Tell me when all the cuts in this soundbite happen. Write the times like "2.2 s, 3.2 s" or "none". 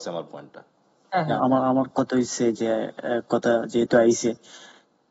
1.4 s